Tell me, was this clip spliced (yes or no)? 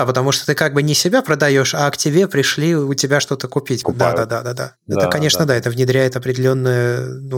yes